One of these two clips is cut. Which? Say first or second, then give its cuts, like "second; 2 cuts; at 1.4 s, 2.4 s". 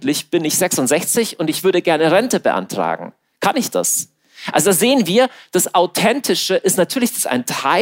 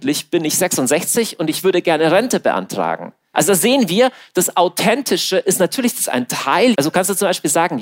second; 2 cuts; at 3.3 s, 6.7 s